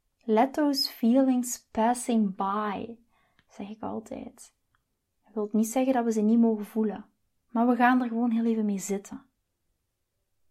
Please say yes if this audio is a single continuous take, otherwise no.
yes